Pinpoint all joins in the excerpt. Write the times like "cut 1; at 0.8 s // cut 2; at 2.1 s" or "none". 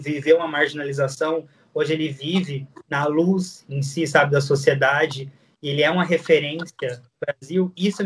none